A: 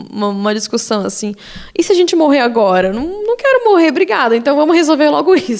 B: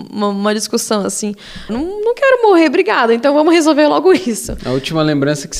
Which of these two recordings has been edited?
B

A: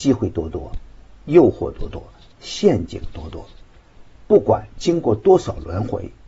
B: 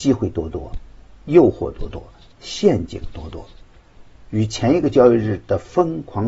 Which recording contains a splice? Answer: B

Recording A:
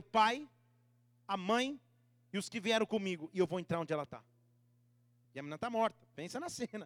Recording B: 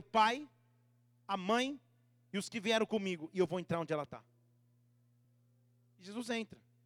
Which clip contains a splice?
A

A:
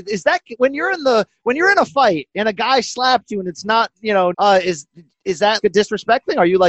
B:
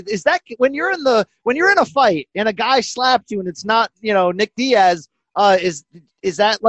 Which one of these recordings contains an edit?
A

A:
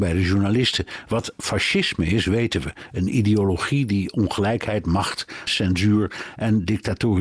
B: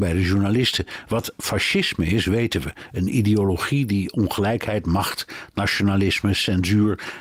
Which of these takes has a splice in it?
A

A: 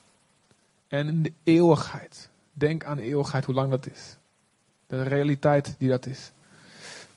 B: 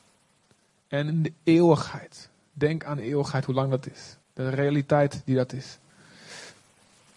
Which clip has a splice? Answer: B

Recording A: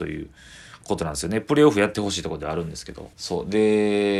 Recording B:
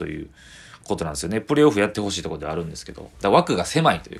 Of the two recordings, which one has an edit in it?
A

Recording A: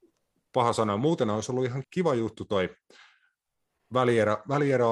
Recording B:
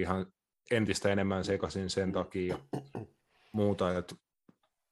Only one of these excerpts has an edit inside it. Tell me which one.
A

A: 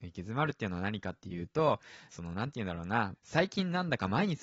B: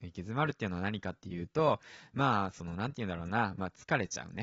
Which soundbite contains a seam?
A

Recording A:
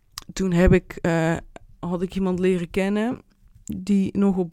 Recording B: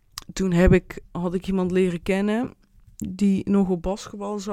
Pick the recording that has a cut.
B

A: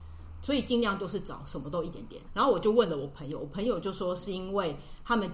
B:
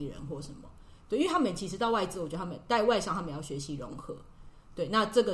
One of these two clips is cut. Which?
A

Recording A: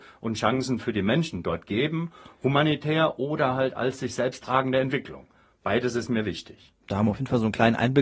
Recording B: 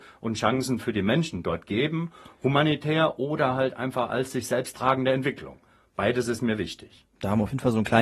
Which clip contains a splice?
A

